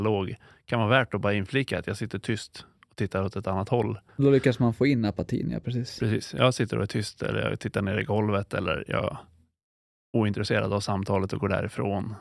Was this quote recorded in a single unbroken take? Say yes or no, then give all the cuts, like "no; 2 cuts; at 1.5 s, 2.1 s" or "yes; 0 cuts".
no; 1 cut; at 4.1 s